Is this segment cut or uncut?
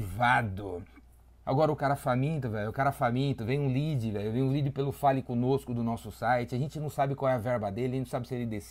cut